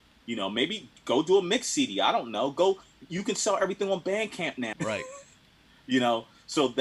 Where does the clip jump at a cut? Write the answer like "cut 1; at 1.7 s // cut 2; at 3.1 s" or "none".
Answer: cut 1; at 4.7 s